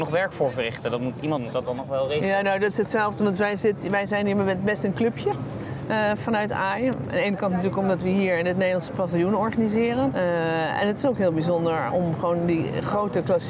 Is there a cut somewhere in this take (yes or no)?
yes